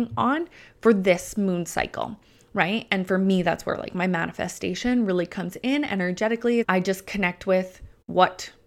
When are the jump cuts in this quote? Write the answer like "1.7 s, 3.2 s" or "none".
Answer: 6.6 s